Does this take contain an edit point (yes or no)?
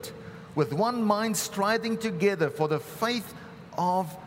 no